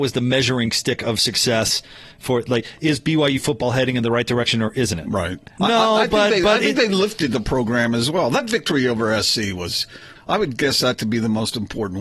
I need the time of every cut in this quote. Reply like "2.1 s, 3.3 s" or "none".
5.6 s, 10.2 s